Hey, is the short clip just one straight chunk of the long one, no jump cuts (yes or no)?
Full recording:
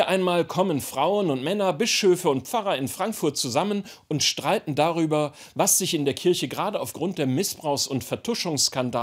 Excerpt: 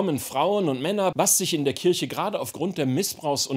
no